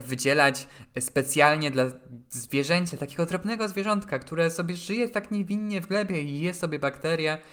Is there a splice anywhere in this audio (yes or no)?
no